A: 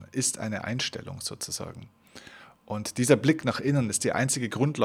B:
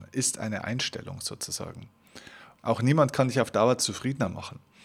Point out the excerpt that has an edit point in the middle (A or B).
B